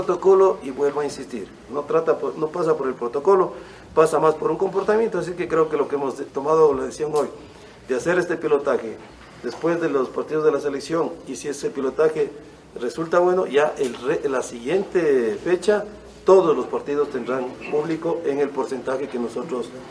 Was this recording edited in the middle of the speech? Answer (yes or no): yes